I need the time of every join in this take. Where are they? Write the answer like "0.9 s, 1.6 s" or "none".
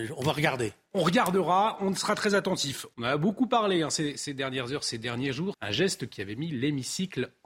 2.9 s, 5.5 s